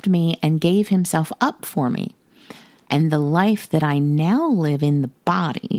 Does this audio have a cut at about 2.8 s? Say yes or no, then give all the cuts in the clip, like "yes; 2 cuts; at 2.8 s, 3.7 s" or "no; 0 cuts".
yes; 1 cut; at 2.8 s